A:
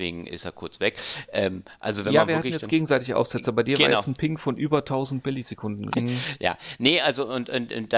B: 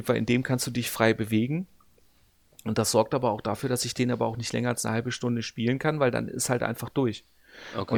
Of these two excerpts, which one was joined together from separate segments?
A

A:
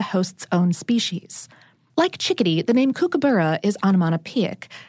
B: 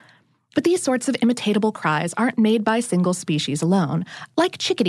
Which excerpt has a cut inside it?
A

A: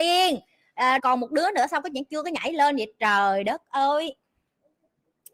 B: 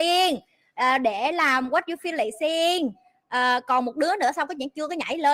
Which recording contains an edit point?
A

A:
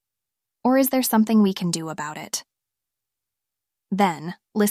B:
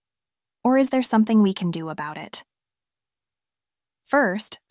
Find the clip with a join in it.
A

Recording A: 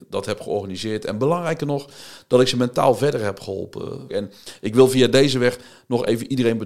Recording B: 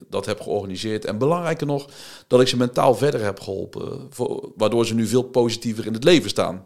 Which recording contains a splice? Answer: A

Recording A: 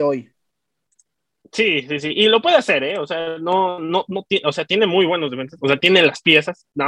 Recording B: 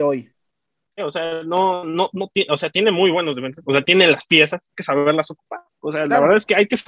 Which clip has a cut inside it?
B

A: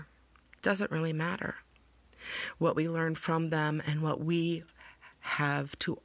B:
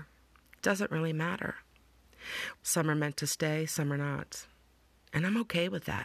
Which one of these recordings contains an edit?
B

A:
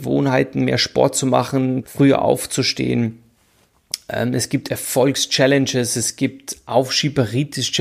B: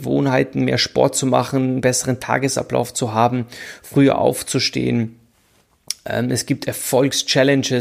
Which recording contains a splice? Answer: A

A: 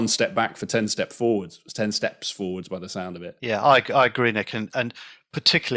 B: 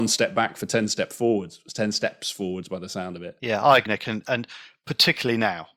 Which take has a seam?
B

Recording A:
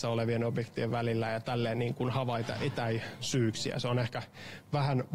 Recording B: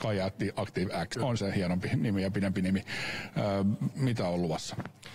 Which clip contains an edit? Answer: B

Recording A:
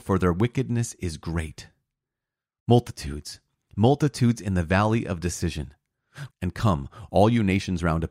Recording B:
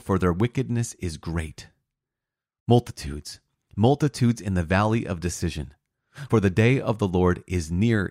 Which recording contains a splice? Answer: A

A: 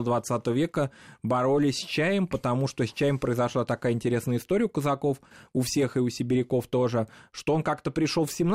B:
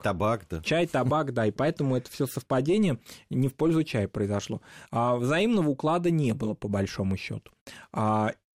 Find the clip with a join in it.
B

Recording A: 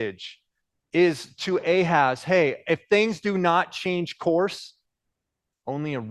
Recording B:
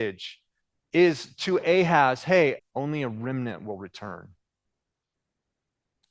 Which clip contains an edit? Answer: B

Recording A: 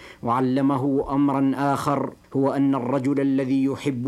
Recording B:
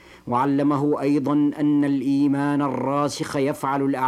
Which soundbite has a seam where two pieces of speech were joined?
A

